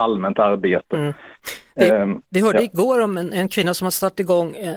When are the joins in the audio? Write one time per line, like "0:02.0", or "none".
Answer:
none